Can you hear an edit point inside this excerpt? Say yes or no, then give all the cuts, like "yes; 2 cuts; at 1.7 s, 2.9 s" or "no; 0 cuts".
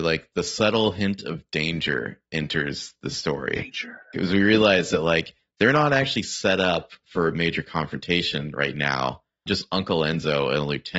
yes; 1 cut; at 9.5 s